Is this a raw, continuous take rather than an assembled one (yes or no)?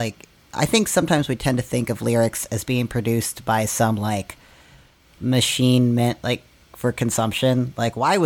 yes